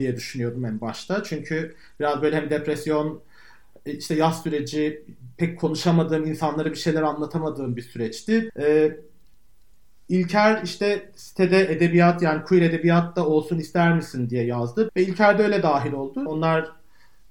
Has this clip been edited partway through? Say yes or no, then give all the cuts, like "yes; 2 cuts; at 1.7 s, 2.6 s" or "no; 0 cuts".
yes; 3 cuts; at 8.5 s, 14.9 s, 16.3 s